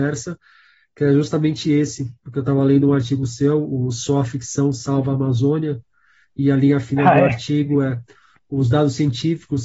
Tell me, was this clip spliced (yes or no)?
no